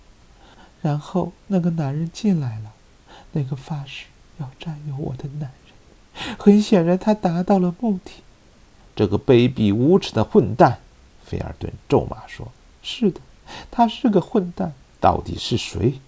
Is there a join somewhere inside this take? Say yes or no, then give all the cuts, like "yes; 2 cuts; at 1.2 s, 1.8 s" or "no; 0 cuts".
yes; 1 cut; at 14.9 s